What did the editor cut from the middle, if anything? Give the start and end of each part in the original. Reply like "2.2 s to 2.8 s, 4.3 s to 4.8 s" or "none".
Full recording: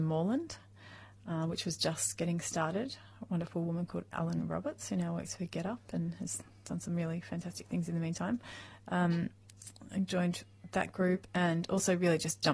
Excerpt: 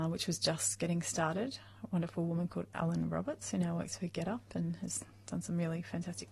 none